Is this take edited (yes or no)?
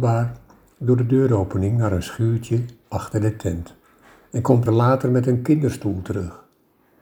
yes